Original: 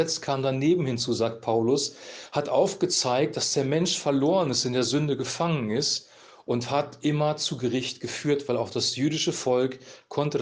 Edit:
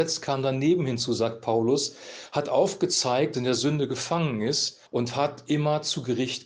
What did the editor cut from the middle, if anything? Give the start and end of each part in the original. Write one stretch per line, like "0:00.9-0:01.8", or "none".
0:03.3-0:04.6
0:06.2-0:06.4